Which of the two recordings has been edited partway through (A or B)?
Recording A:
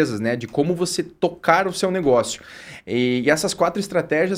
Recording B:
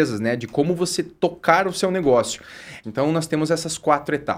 B